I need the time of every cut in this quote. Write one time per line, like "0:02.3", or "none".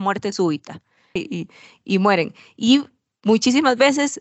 0:01.2